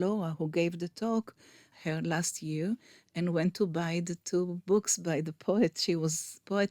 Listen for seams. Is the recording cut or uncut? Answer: cut